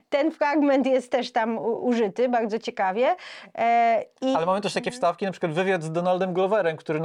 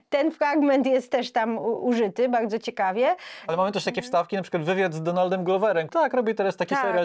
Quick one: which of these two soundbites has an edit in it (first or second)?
second